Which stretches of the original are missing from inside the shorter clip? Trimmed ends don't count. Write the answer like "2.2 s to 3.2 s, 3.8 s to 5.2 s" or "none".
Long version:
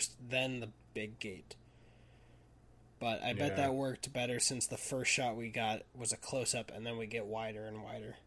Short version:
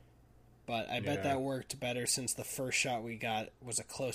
none